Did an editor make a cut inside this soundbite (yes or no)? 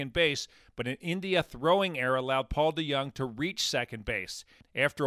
no